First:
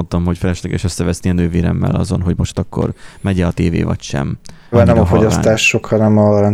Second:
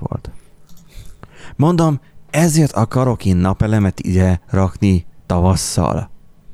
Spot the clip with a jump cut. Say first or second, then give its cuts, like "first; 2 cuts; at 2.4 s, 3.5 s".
first; 1 cut; at 4.7 s